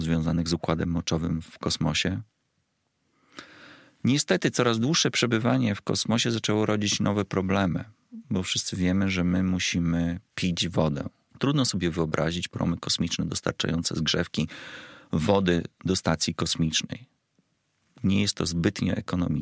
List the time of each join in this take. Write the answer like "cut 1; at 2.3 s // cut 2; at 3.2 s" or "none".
cut 1; at 11.3 s